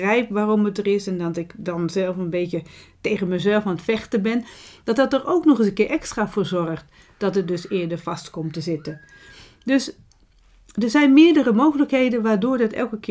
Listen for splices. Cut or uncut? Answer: uncut